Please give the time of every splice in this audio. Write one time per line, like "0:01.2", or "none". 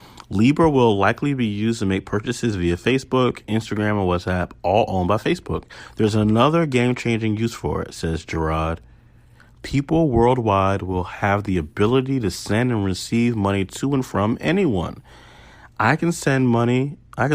none